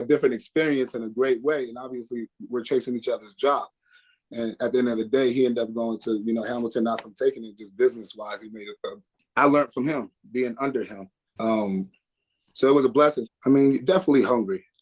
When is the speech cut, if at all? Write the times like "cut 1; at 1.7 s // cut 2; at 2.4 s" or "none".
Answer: cut 1; at 9.2 s // cut 2; at 11.4 s // cut 3; at 13.3 s